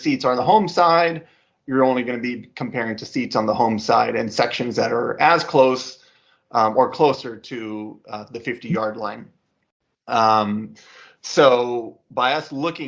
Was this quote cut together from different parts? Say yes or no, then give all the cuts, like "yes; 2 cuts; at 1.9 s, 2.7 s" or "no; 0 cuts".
no; 0 cuts